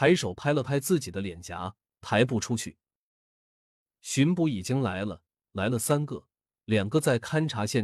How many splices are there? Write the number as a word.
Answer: zero